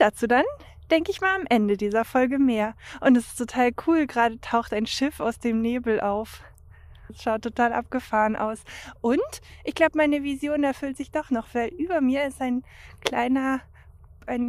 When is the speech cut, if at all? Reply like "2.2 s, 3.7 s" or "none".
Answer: 7.1 s